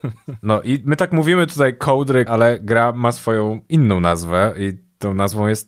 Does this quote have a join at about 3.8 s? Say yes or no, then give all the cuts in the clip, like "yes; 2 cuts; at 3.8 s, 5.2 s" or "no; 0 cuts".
no; 1 cut; at 2.3 s